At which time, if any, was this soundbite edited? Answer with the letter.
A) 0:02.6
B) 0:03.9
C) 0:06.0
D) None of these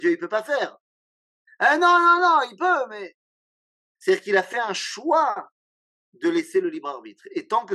B